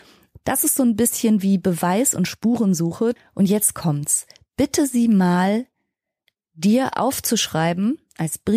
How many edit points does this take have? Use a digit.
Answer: 1